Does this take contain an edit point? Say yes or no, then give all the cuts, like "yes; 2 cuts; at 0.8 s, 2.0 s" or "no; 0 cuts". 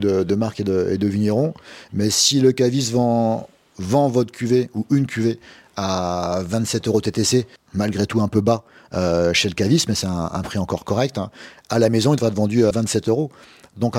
yes; 2 cuts; at 7.6 s, 12.7 s